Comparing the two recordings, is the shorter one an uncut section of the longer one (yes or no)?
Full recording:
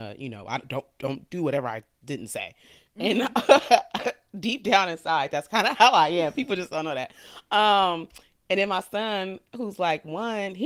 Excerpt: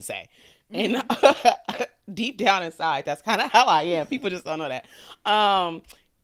yes